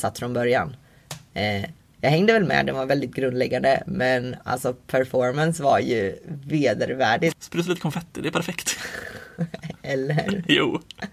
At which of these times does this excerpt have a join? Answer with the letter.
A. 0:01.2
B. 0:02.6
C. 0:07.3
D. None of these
C